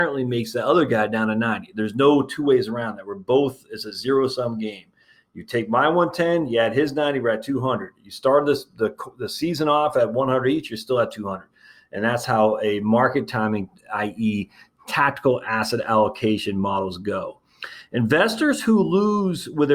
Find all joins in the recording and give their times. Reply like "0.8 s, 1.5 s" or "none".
none